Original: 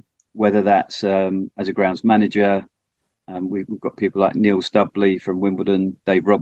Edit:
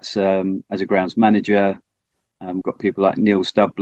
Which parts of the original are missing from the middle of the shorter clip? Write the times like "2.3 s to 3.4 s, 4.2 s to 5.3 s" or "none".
3.5 s to 3.8 s